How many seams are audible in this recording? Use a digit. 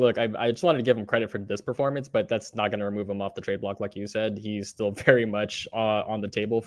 0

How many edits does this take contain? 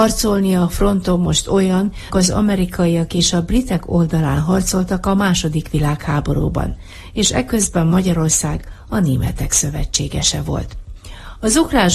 1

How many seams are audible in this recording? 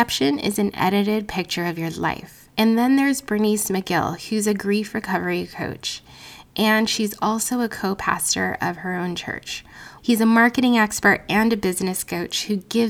2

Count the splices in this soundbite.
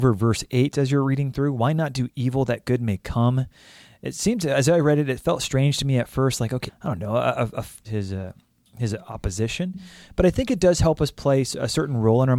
2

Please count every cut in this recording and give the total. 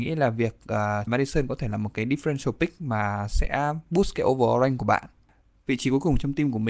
1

